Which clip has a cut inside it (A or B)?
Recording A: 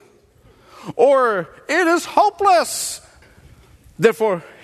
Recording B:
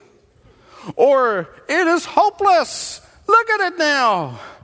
A